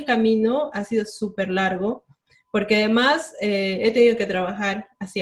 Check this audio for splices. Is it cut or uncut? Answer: uncut